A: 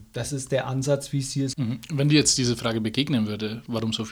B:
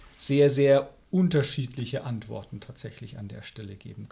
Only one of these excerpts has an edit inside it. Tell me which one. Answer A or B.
A